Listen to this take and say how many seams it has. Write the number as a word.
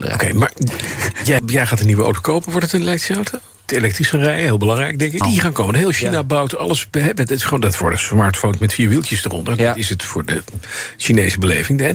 three